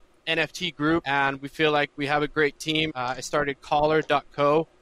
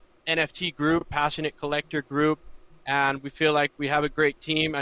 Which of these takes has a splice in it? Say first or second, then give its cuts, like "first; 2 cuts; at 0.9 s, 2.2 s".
first; 2 cuts; at 1.0 s, 2.9 s